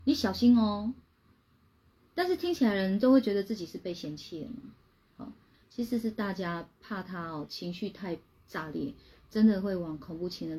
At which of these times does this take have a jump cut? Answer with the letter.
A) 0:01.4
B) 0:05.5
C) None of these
B